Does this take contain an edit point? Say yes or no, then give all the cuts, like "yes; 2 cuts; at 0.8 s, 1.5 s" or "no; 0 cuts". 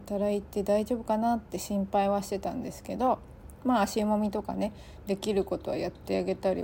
no; 0 cuts